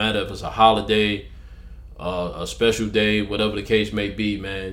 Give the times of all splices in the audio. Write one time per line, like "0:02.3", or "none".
none